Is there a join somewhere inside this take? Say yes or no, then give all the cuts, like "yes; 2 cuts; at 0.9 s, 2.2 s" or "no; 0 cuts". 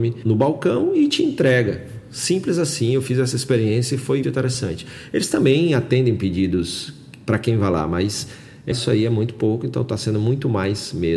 yes; 2 cuts; at 4.2 s, 8.7 s